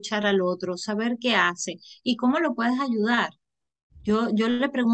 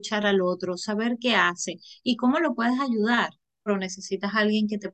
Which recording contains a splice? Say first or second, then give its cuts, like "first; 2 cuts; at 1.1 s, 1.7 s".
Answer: second; 1 cut; at 3.7 s